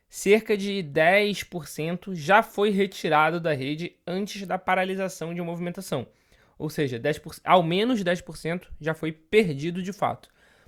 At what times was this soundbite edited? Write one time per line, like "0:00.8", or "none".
none